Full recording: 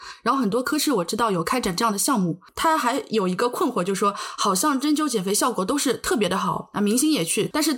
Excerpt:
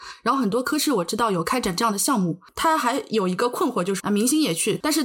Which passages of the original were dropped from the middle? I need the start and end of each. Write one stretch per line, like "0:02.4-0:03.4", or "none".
0:04.0-0:06.7